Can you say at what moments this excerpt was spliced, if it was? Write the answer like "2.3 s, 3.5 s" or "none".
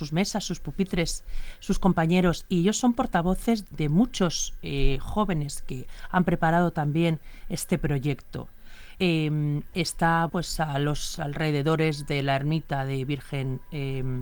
3.7 s, 9.0 s, 10.3 s